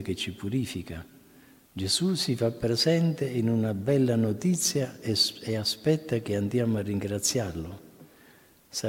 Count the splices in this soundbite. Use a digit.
1